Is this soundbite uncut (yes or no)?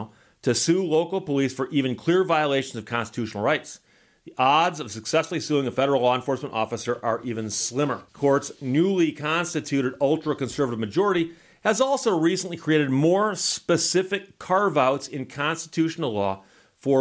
no